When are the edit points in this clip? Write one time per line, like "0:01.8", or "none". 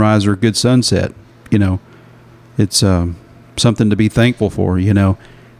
none